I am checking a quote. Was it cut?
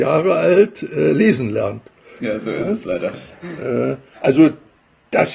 yes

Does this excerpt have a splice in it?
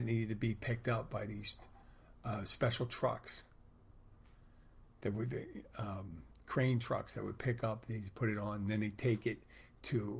no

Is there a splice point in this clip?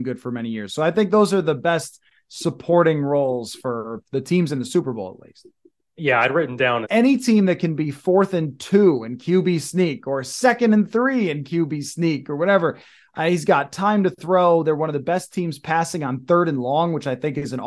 yes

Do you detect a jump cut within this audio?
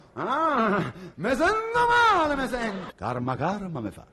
yes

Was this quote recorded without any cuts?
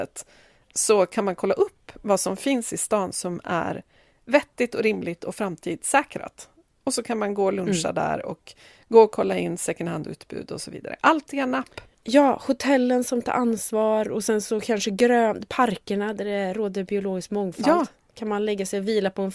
yes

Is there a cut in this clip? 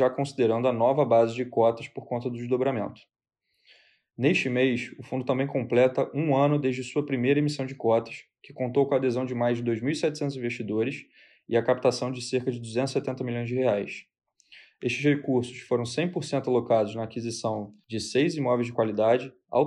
no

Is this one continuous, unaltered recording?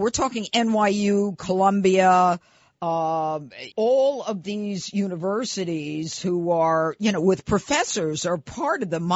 no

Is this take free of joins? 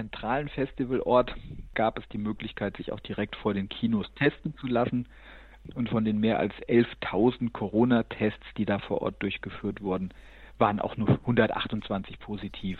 yes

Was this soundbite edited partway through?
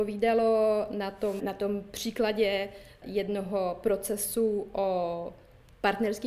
yes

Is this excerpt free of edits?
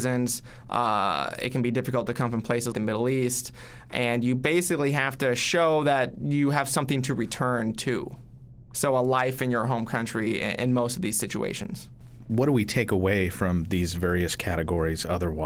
no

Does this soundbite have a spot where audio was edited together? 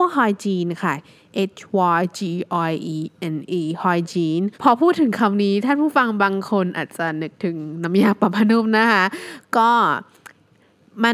yes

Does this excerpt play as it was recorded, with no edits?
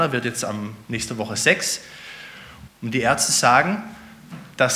no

